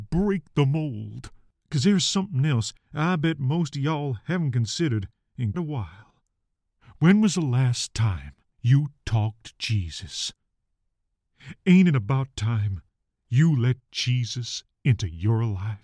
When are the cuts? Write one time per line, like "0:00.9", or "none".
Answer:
0:05.5

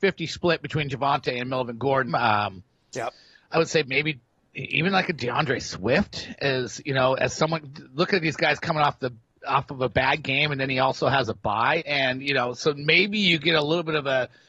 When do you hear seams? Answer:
0:02.1
0:11.8

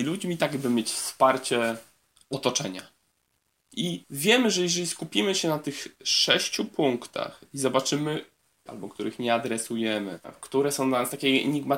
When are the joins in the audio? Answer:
0:08.7

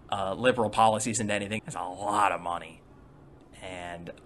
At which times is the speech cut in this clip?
0:01.6

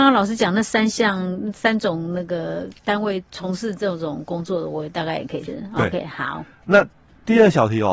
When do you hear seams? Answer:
0:03.3
0:05.5

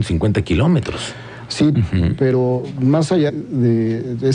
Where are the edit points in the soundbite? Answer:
0:01.7
0:03.3

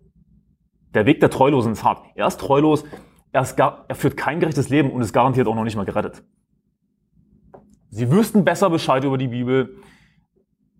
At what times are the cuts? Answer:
0:03.3
0:07.8

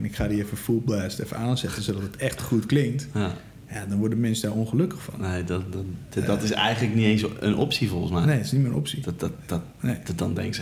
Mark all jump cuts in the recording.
none

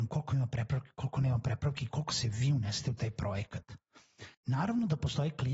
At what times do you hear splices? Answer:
0:04.3

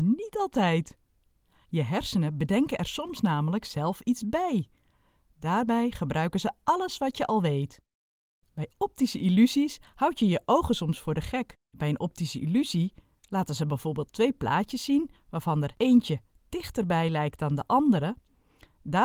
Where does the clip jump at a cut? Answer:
0:08.4
0:11.6

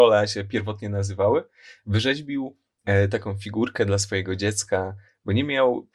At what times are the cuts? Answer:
none

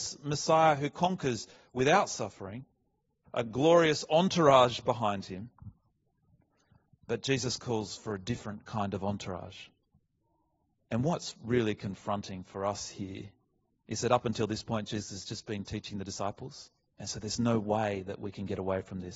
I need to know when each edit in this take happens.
0:03.2
0:10.8
0:16.9

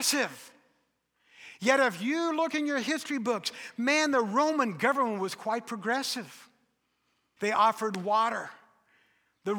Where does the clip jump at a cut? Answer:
0:07.4

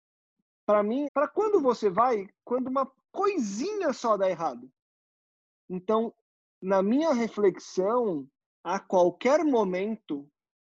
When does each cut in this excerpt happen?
0:01.0
0:05.5
0:08.5

